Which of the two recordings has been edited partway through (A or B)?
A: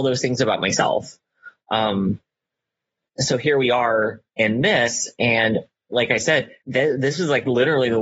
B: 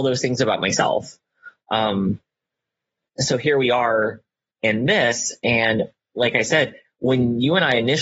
A